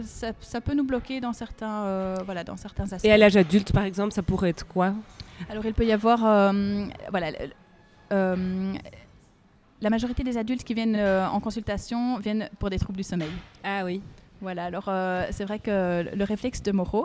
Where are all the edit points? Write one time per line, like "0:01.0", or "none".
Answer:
none